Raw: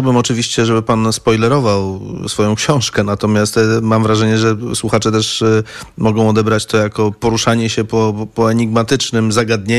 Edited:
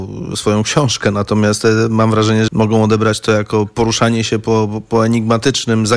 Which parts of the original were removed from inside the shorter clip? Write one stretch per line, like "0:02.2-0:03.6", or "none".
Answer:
0:04.4-0:05.9